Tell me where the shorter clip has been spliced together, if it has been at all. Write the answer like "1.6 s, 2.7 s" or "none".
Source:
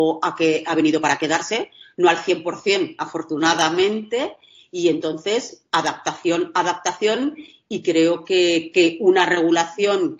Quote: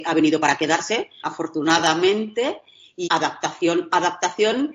1.2 s, 3.1 s